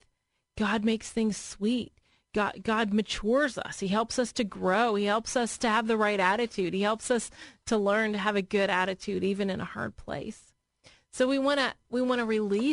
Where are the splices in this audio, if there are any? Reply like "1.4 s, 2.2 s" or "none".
none